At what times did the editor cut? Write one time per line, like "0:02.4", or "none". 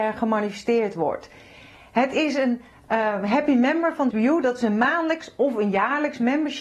0:04.1